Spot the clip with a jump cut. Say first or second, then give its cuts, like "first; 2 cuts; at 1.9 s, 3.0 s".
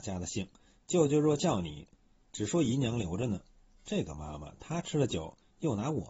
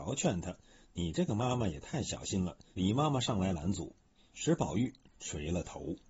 second; 2 cuts; at 2.7 s, 4.3 s